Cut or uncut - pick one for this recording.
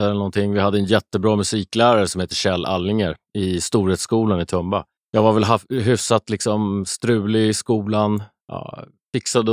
uncut